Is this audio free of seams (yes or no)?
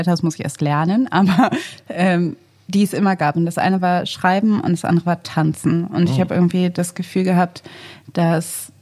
yes